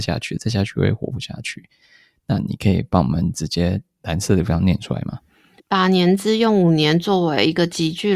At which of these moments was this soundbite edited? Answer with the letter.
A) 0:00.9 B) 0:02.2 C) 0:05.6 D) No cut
C